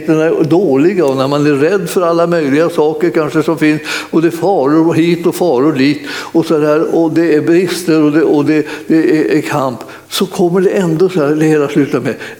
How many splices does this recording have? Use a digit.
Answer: 0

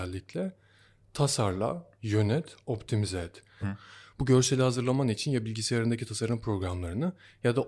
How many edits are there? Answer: 2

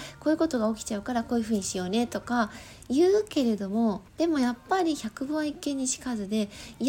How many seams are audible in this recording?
1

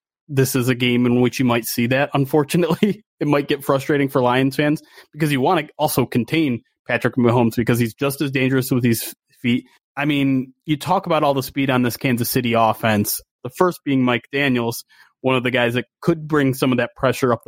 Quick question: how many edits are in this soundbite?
2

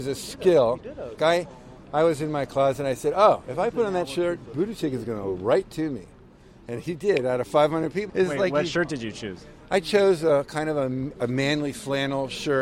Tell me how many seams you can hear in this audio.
2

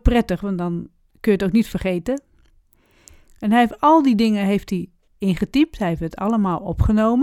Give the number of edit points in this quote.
1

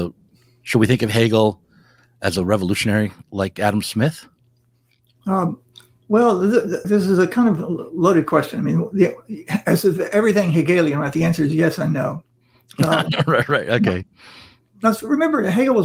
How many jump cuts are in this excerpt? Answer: 2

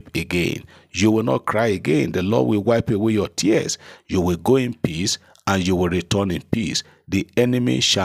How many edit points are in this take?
1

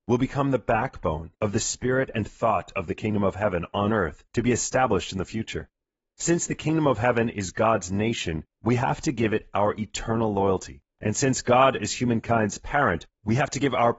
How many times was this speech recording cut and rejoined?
0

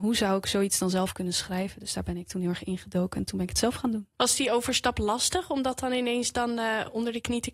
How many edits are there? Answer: 1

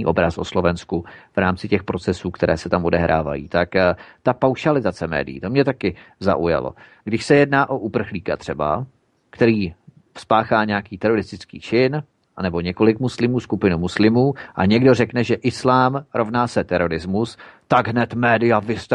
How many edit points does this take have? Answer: 1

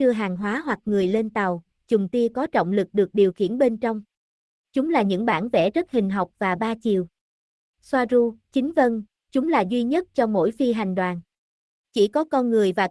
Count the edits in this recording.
1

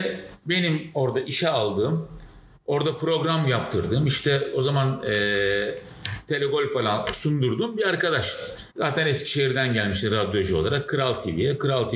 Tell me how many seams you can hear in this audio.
1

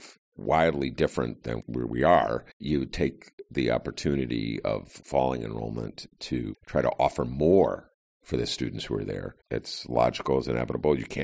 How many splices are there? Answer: 2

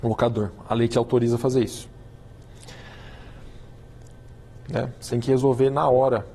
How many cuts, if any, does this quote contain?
1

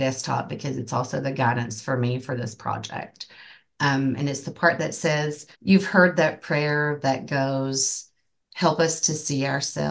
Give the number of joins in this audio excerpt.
1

